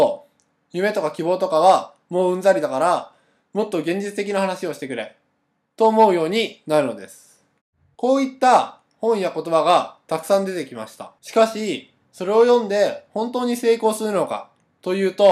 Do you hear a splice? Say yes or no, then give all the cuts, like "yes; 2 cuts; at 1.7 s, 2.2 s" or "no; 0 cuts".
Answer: yes; 2 cuts; at 7.9 s, 11.2 s